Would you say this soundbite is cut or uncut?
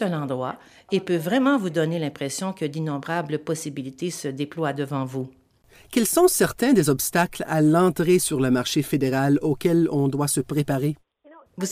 uncut